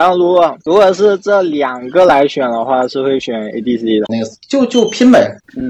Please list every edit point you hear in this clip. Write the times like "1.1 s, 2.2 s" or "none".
4.1 s